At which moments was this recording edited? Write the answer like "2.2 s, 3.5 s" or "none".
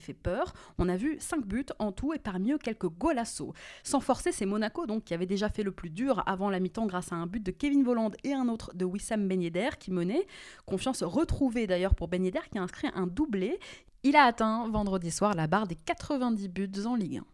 none